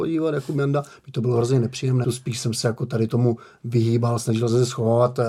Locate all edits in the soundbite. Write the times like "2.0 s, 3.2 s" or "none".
2.0 s